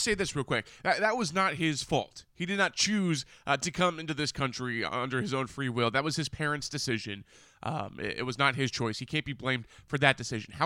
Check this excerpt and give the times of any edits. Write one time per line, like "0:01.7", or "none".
none